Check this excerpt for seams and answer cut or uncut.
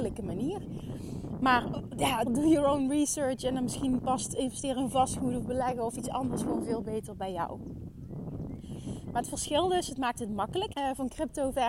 cut